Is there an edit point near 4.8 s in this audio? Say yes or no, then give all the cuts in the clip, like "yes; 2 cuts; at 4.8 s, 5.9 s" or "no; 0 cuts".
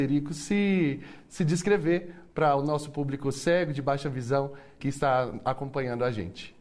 yes; 1 cut; at 4.8 s